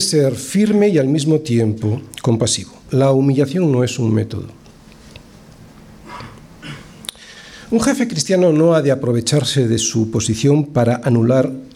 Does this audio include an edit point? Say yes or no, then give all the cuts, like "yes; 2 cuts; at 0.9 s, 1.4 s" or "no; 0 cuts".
no; 0 cuts